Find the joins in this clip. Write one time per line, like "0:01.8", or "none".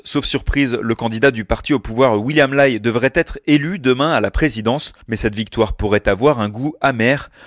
0:05.0